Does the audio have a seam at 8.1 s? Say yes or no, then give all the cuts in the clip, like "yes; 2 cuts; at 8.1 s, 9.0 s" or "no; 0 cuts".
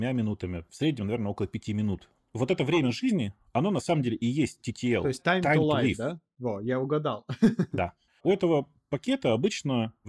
yes; 1 cut; at 8.1 s